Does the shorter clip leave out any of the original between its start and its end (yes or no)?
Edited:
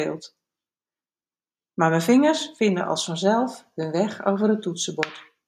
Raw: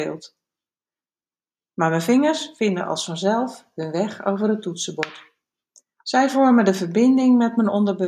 no